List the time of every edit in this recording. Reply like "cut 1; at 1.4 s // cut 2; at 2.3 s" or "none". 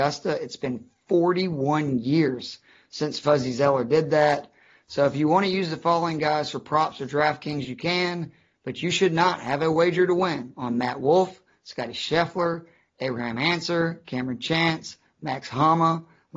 none